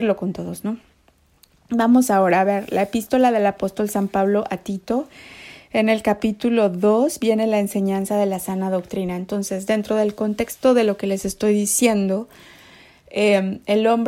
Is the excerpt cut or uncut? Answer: uncut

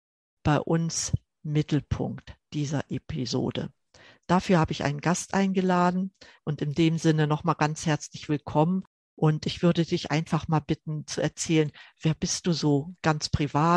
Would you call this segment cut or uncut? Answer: cut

